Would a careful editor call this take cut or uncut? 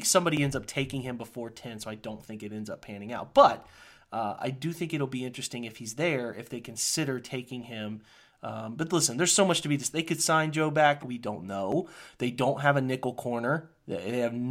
cut